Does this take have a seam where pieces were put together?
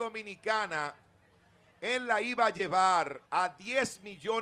yes; 1 cut; at 3.3 s

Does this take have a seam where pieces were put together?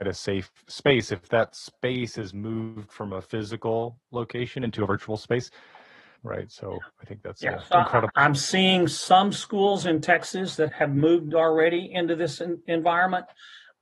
yes; 3 cuts; at 6.2 s, 8.1 s, 10.7 s

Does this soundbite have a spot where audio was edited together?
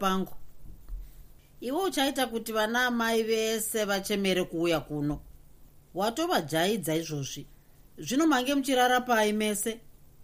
no; 0 cuts

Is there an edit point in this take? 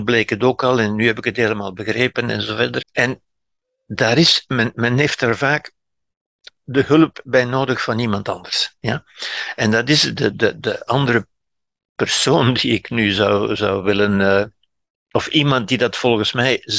yes; 1 cut; at 2.8 s

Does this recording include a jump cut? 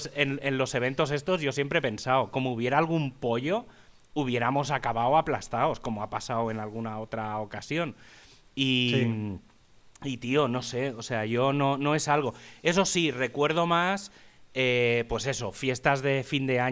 no; 0 cuts

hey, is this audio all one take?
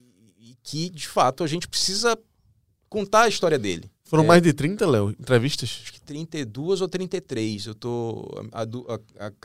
yes; 0 cuts

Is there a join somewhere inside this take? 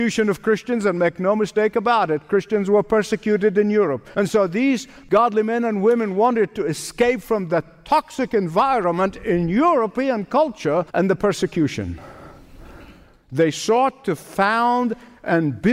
yes; 2 cuts; at 4.1 s, 10.9 s

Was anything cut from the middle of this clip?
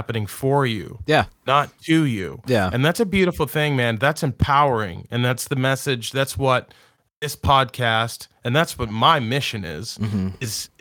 no; 0 cuts

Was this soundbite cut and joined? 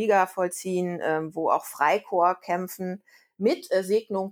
no; 0 cuts

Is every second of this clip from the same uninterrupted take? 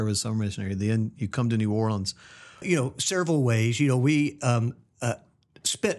no; 1 cut; at 2.6 s

